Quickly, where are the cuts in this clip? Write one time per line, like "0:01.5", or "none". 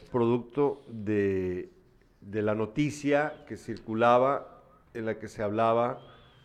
none